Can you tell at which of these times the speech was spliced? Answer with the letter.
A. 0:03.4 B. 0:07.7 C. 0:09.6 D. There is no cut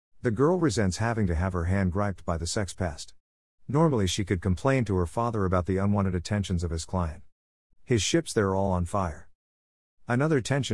B